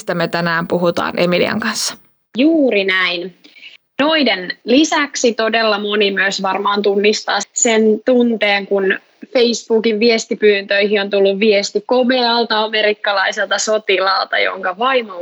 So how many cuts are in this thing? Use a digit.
1